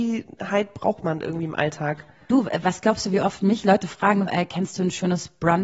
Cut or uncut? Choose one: cut